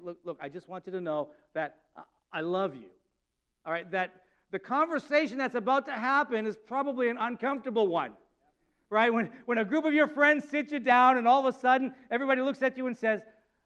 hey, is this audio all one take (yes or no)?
yes